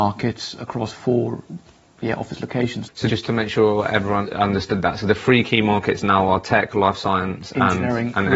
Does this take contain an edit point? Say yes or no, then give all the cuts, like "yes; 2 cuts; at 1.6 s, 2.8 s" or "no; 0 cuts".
no; 0 cuts